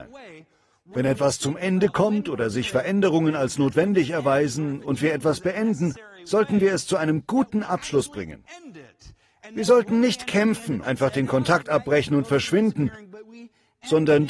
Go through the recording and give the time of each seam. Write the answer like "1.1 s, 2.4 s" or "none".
10.8 s

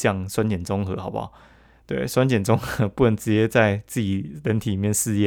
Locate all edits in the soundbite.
none

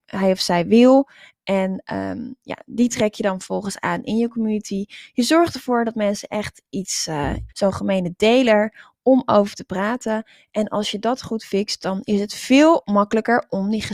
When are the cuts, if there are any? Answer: 7.5 s

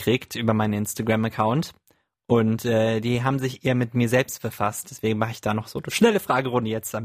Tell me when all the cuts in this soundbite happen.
none

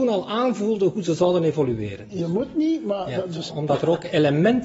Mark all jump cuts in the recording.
2.1 s, 3.5 s

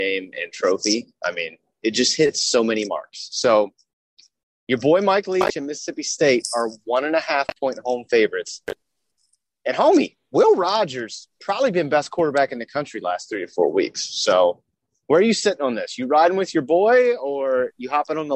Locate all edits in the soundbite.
none

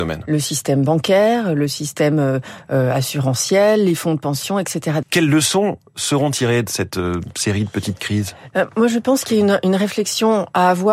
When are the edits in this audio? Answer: 5.0 s

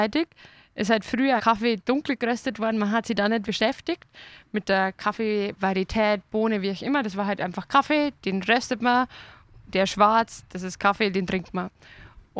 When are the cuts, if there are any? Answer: 1.4 s, 3.4 s

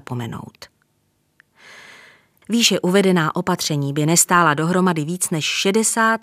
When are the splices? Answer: 2.4 s

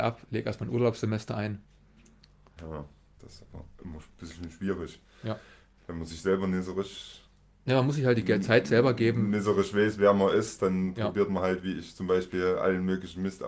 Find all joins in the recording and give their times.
2.6 s

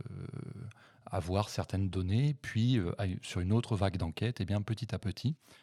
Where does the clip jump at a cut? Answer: none

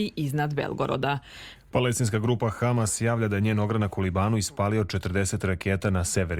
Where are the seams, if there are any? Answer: 1.6 s

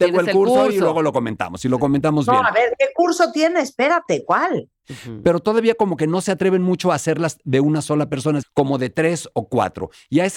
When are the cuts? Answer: 4.8 s, 8.4 s

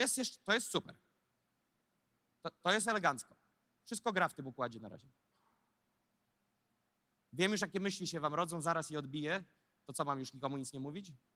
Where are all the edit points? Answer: none

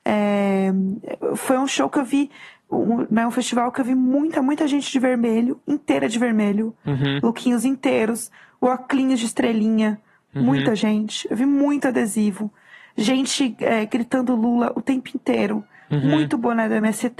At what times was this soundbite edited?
none

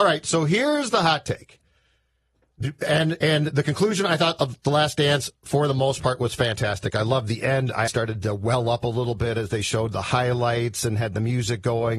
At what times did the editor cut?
7.9 s

